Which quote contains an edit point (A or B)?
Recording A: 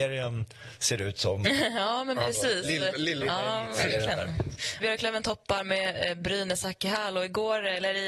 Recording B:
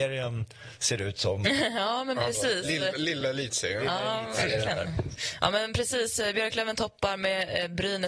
A